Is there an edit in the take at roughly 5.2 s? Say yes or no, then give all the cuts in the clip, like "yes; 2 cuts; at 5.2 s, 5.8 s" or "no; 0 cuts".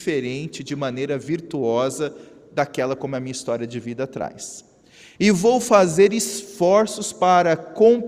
yes; 1 cut; at 5.2 s